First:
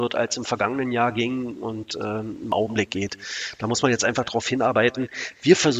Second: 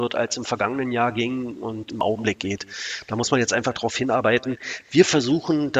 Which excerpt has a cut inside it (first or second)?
second